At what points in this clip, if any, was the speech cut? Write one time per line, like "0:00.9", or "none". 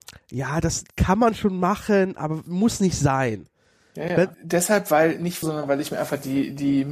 0:04.3
0:05.4